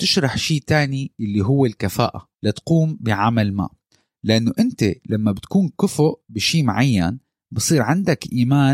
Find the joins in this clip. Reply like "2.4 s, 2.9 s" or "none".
2.3 s